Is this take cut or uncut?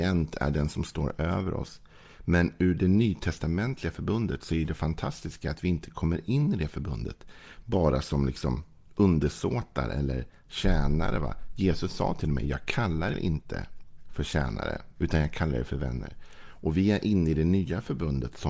cut